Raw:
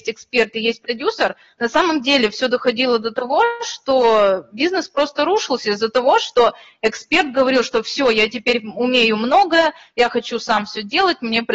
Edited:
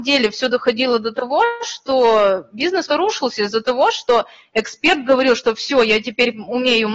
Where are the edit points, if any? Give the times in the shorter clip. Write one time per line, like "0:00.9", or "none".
0:02.9